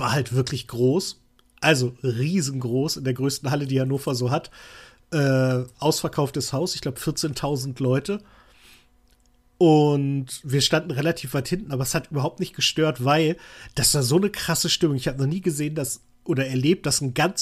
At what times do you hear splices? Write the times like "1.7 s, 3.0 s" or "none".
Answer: none